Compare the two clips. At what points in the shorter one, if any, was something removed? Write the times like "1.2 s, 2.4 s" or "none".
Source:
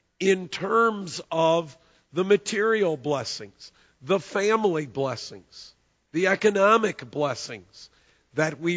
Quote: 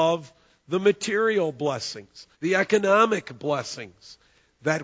2.3 s